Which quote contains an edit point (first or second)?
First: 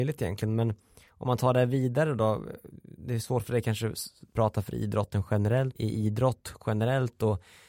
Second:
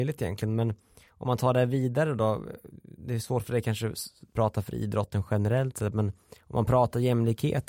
first